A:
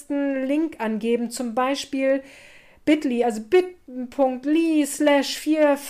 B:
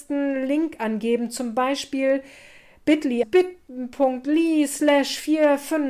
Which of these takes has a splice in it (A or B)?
B